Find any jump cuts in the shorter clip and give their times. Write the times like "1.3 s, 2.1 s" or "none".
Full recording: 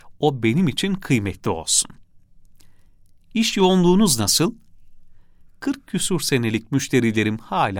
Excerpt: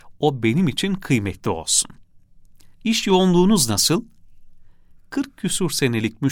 2.7 s